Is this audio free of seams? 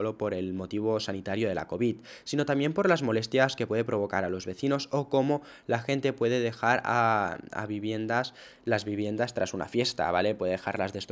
yes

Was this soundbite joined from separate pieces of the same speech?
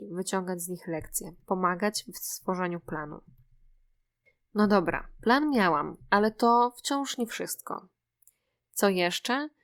no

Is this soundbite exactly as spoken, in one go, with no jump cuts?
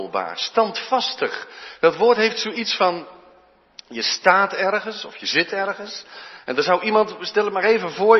yes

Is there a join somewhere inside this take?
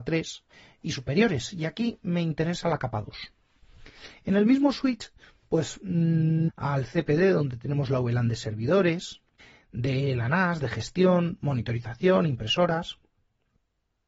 yes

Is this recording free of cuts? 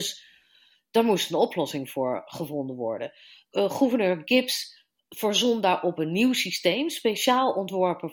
yes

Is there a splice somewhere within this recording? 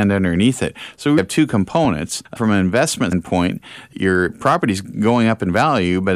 yes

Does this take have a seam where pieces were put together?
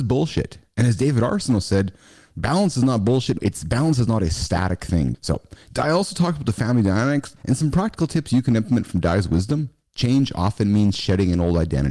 yes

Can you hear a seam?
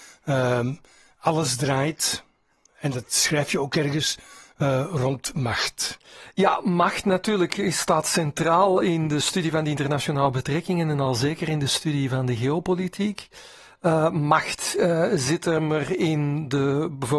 no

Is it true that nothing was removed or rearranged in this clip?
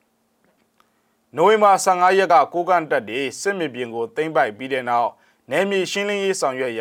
yes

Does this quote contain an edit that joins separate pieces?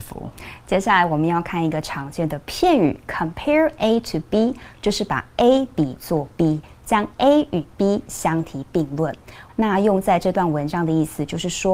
yes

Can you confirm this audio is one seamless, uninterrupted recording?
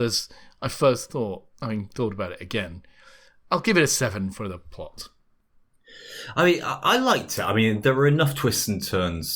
yes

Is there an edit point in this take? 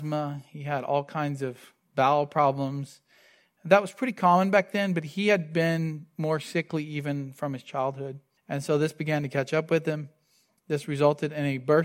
yes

